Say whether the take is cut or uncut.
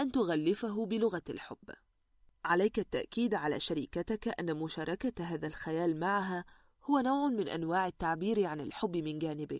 uncut